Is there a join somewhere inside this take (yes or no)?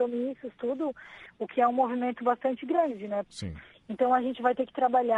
yes